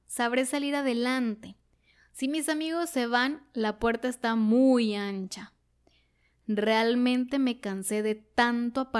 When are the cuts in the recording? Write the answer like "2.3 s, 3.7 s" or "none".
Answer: none